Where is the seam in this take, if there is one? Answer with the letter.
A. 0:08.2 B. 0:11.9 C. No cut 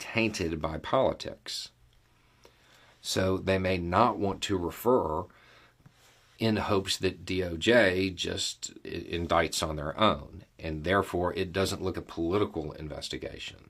B